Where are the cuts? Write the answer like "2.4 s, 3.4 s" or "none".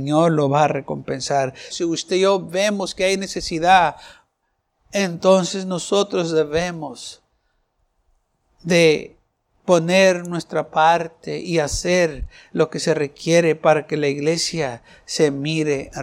1.7 s